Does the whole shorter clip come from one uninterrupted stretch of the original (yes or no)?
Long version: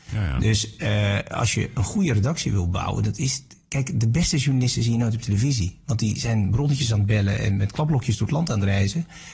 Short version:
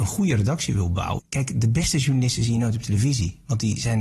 no